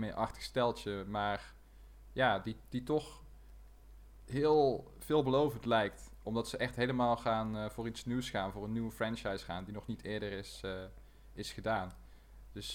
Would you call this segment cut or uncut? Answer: uncut